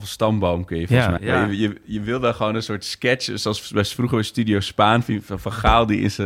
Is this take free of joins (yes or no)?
no